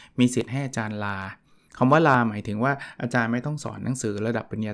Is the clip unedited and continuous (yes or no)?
yes